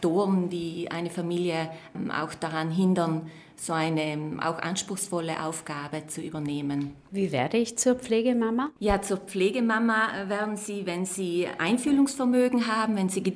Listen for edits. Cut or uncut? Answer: uncut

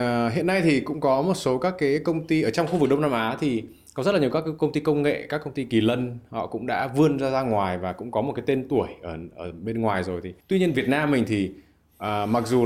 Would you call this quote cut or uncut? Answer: uncut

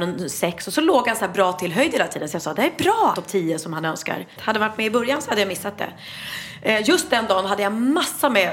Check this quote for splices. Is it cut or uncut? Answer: cut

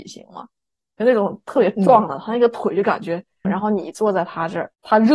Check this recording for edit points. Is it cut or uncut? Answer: cut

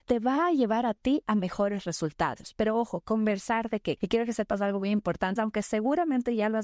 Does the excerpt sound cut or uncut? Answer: cut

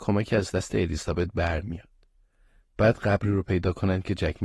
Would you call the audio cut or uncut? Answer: uncut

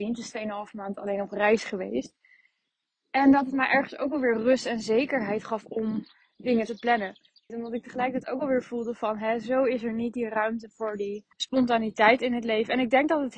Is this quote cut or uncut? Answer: cut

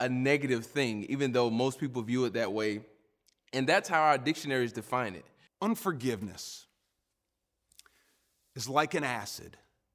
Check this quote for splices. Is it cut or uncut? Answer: cut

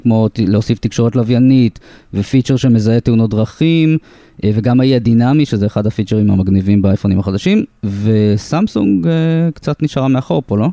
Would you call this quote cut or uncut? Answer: uncut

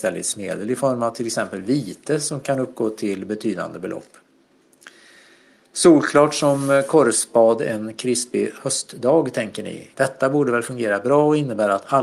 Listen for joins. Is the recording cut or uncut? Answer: cut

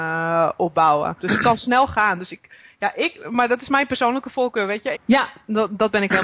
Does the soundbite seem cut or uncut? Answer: cut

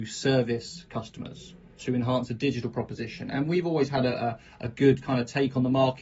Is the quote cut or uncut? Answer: uncut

